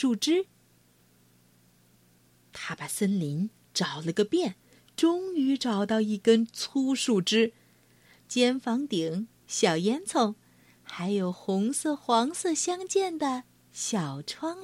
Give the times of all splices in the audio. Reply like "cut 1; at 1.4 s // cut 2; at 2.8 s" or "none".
cut 1; at 8.2 s

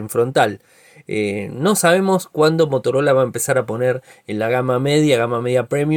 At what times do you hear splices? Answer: none

